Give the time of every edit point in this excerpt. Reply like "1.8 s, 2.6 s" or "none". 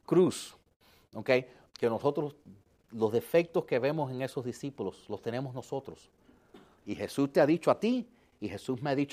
1.7 s, 6.8 s